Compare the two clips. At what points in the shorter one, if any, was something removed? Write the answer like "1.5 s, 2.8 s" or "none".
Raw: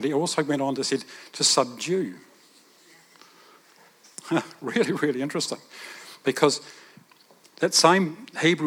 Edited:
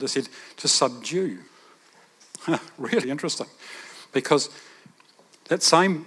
1.5 s, 3.0 s